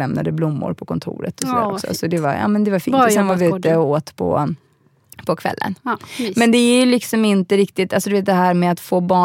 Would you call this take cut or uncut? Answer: uncut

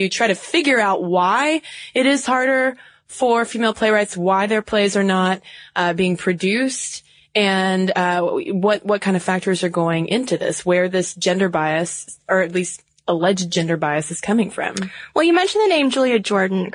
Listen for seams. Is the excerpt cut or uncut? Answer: uncut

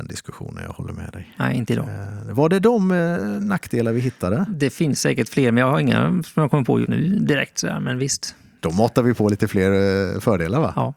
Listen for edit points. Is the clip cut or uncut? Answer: cut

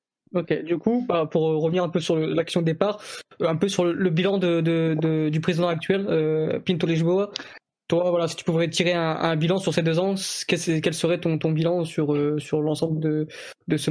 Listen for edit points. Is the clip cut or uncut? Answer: uncut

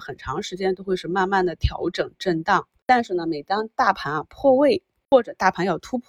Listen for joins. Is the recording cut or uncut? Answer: uncut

